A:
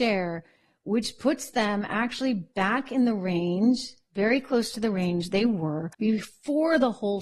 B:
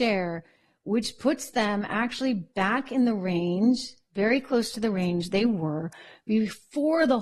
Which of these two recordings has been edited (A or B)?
A